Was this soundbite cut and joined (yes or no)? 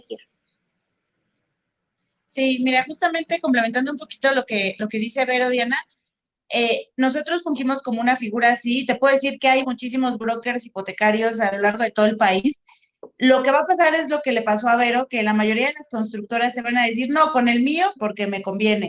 yes